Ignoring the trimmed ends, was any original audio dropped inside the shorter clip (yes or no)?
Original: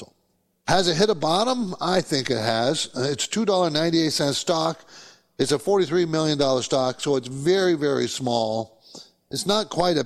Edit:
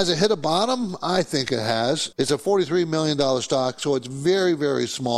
yes